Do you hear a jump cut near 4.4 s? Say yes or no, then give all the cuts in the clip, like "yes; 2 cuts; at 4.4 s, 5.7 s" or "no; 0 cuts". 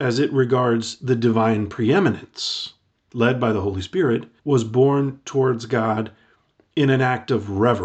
yes; 2 cuts; at 3.1 s, 4.4 s